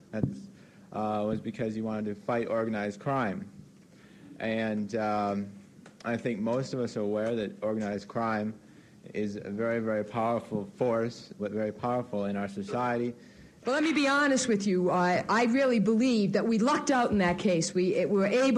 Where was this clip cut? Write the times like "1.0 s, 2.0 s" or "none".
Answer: 11.4 s, 13.6 s